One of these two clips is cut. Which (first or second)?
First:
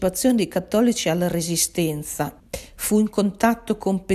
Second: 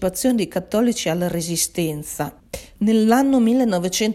second